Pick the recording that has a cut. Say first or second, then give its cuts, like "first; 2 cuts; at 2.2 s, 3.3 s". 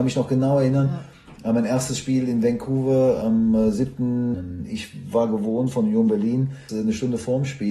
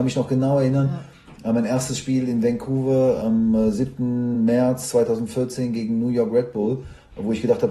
first; 2 cuts; at 4.3 s, 6.7 s